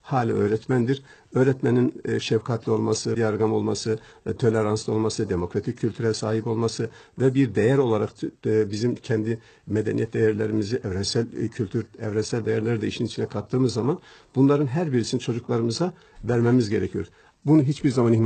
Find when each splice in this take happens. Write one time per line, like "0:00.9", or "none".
0:03.1
0:17.3